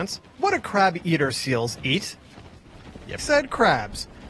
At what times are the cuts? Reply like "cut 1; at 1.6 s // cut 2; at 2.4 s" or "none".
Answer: cut 1; at 3.2 s